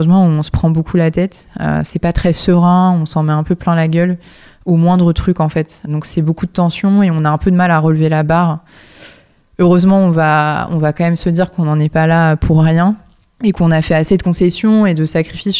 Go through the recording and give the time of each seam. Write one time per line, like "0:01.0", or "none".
none